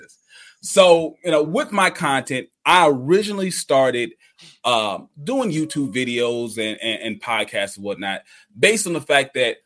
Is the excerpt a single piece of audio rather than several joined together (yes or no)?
yes